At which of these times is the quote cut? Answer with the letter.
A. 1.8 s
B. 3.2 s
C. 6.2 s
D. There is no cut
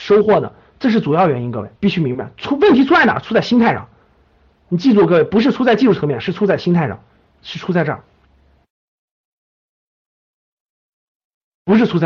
A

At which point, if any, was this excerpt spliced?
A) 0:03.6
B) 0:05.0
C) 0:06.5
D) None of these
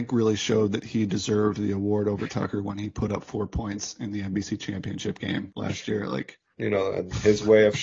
C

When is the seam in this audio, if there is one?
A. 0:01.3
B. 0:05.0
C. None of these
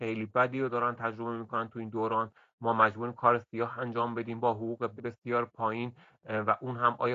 B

